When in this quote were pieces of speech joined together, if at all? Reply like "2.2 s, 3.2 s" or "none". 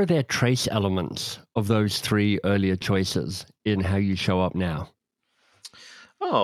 none